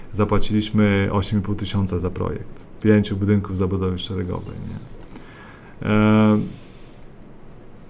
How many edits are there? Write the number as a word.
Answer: one